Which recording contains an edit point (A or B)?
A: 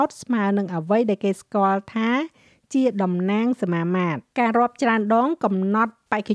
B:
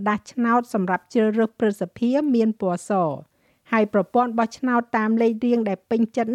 A